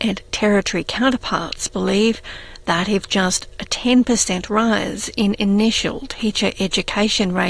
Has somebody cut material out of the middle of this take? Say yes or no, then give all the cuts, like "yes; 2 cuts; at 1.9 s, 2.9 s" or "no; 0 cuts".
no; 0 cuts